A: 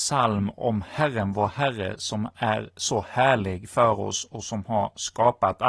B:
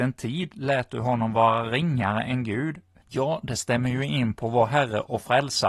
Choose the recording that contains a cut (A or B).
B